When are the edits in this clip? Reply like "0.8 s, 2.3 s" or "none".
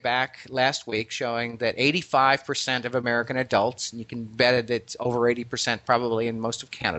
none